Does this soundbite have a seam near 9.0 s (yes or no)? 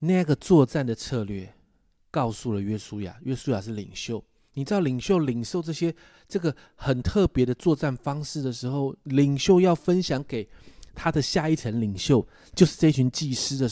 no